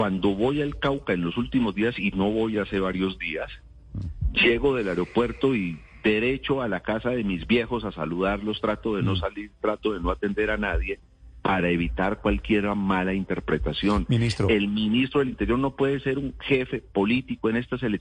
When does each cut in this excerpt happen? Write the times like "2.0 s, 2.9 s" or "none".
none